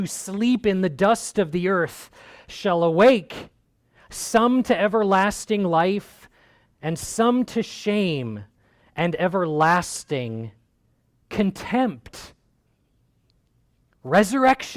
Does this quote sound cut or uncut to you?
uncut